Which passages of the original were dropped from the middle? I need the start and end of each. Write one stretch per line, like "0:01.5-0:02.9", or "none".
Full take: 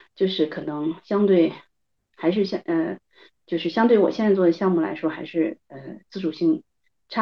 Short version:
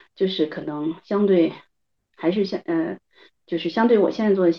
none